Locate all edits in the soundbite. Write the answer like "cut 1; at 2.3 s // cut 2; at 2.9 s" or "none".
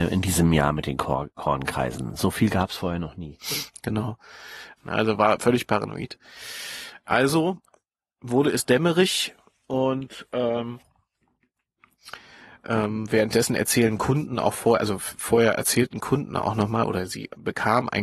cut 1; at 4.8 s